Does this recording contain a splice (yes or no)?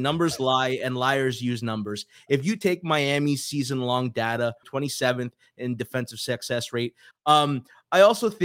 yes